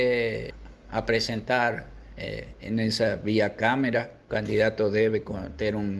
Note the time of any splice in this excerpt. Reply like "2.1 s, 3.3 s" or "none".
4.3 s